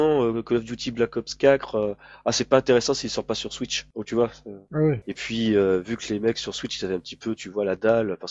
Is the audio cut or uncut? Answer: cut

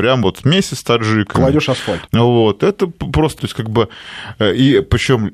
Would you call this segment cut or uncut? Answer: cut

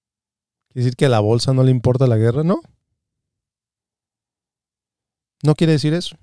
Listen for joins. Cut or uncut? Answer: uncut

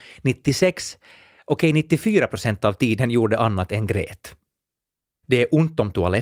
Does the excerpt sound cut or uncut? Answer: cut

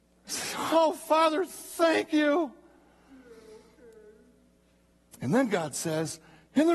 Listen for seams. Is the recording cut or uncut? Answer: uncut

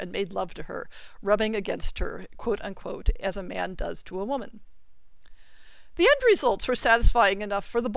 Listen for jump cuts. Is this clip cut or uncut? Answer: uncut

